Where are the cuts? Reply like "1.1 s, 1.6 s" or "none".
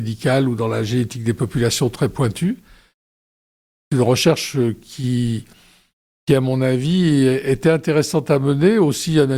none